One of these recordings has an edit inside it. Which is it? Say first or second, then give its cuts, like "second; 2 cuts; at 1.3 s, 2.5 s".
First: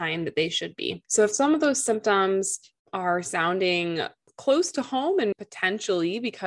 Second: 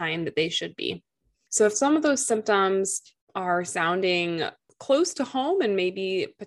first; 2 cuts; at 1.0 s, 5.3 s